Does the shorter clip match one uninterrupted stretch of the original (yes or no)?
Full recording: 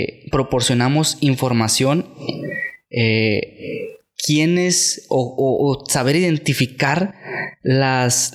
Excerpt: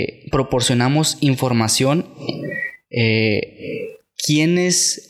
yes